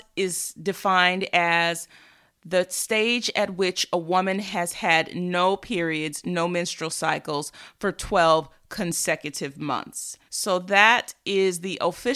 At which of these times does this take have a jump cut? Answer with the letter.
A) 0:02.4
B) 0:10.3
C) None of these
B